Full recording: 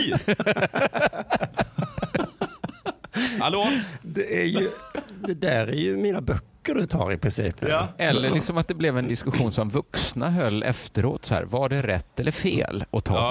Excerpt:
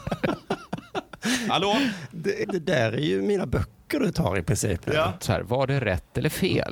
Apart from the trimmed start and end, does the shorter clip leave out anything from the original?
yes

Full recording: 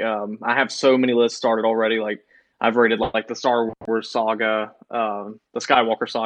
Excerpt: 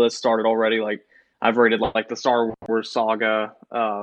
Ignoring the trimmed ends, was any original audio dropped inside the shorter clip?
no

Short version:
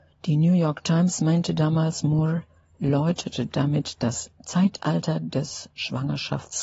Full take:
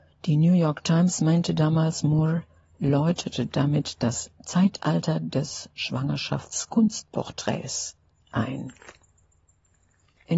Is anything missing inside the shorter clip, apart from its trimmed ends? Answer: no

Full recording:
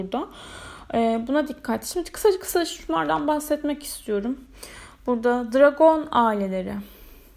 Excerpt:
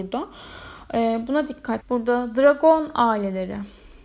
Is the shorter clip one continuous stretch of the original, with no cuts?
no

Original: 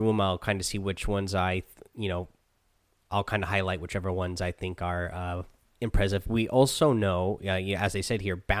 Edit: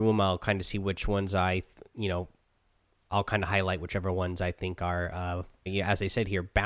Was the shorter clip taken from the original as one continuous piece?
no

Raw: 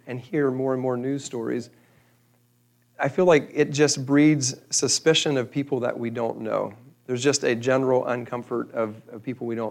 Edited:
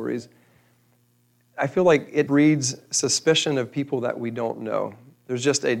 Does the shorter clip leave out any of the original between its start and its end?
yes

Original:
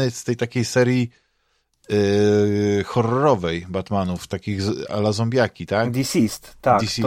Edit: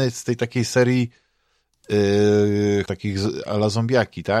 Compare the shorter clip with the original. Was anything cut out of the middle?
yes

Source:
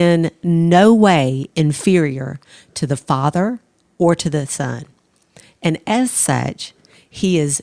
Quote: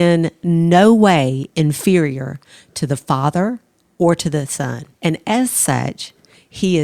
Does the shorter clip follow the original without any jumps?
no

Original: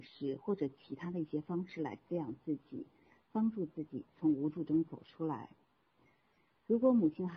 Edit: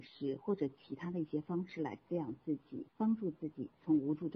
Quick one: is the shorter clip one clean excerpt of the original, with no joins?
no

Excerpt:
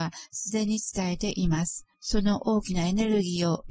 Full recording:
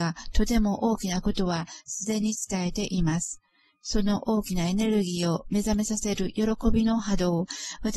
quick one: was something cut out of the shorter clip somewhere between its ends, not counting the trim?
yes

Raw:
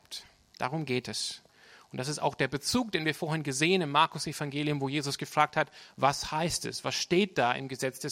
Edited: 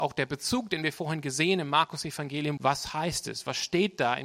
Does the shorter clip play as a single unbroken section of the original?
no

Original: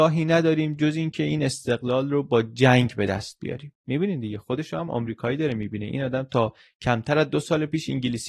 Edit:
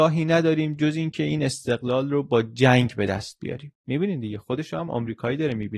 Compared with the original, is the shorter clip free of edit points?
yes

